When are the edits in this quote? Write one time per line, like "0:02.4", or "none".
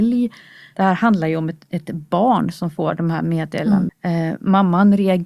0:03.9